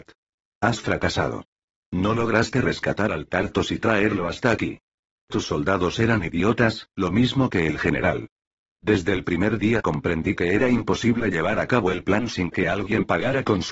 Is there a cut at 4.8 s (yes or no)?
no